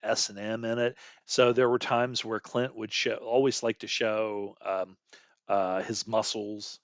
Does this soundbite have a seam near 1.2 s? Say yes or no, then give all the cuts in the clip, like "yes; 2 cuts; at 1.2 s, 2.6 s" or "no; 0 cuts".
yes; 1 cut; at 1.2 s